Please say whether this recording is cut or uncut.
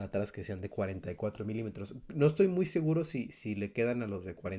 uncut